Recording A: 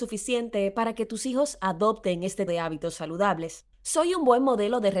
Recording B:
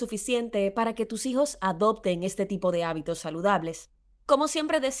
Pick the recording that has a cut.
A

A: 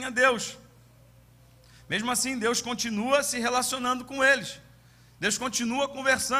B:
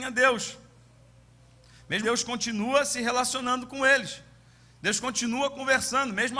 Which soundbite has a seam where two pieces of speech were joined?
B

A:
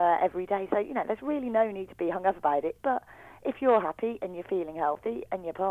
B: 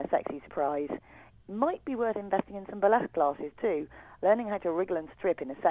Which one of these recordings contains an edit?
A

